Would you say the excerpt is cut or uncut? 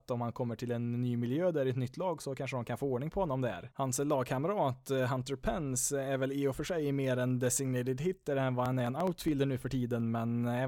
uncut